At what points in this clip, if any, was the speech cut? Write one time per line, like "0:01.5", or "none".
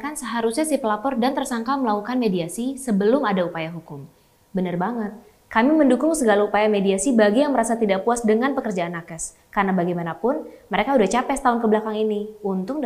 none